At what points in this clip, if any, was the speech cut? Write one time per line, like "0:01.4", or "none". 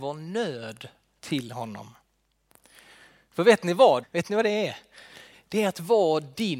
0:04.0